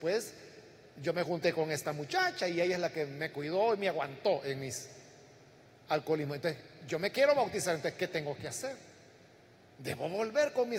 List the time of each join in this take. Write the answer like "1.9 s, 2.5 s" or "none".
none